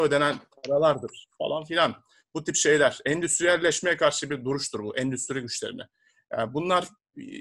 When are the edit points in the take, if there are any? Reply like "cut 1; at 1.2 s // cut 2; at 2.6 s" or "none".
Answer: none